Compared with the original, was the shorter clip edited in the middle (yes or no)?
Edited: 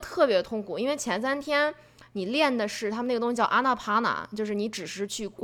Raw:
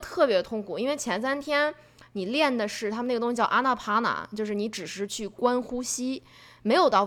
no